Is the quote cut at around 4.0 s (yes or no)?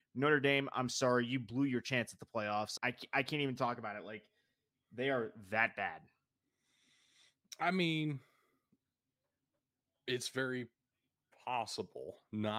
no